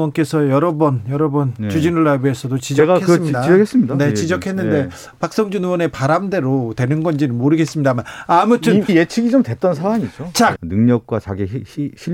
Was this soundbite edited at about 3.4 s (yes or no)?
no